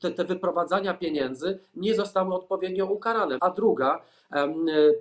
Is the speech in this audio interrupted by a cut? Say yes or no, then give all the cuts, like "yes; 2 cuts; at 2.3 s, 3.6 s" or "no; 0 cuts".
yes; 1 cut; at 3.4 s